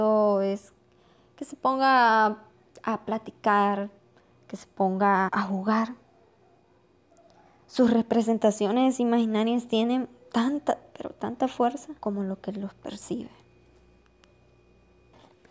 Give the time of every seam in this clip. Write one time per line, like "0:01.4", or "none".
0:05.3
0:12.0